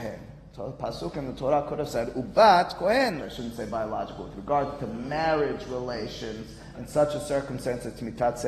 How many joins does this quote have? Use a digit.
2